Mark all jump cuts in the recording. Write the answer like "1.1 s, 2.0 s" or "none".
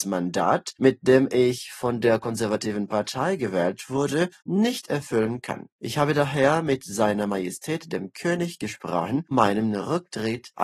9.3 s